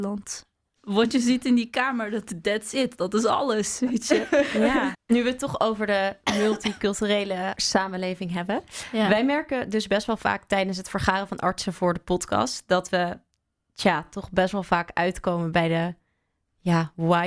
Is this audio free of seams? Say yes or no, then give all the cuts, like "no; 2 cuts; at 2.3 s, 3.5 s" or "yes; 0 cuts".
yes; 0 cuts